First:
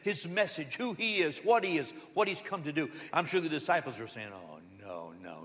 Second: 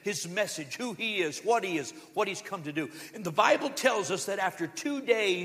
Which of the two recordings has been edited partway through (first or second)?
first